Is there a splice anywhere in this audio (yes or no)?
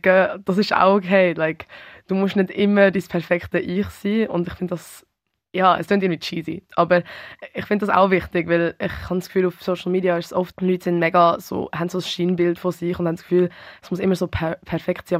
yes